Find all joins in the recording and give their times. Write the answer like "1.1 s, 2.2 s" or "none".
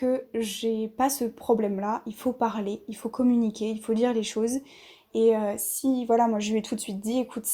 none